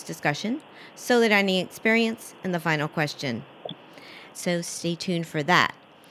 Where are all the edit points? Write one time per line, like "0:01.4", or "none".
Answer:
0:04.3